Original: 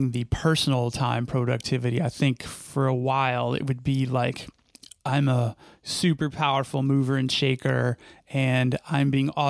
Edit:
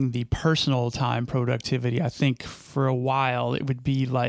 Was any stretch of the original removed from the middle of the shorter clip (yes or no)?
no